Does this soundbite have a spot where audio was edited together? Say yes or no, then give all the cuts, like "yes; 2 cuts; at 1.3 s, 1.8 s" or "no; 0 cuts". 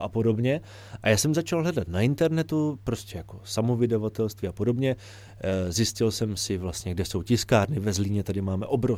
yes; 1 cut; at 1.0 s